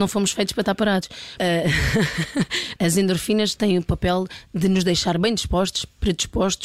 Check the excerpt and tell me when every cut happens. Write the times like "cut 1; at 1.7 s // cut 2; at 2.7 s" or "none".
cut 1; at 1.4 s // cut 2; at 2.8 s